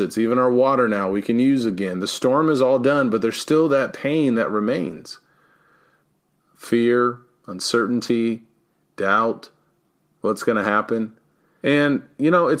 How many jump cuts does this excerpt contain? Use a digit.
1